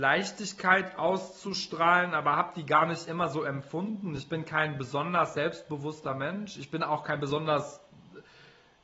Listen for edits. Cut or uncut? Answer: uncut